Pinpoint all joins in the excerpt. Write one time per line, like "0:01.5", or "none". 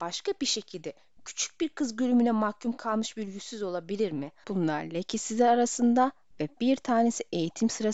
0:04.4